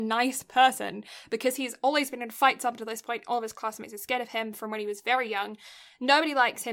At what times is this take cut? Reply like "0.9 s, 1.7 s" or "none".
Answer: none